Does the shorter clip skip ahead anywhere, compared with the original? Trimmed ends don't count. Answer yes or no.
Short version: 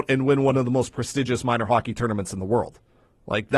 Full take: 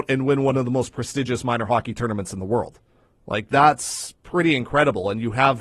no